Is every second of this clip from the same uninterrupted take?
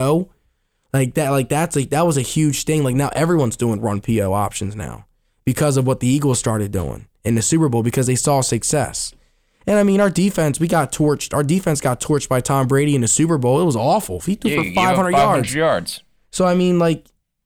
yes; 0 cuts

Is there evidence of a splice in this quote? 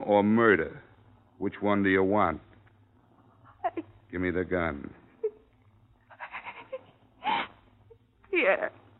no; 0 cuts

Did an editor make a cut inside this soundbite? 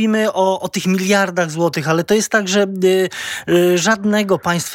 no; 0 cuts

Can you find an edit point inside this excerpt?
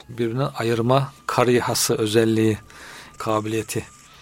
yes; 1 cut; at 3.2 s

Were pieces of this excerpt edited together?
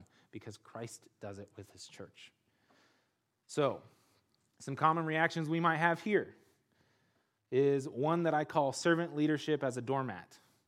no; 0 cuts

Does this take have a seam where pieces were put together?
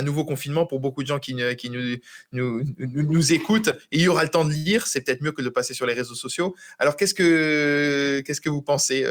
no; 0 cuts

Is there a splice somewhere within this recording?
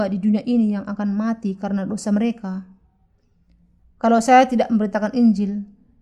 yes; 1 cut; at 3.8 s

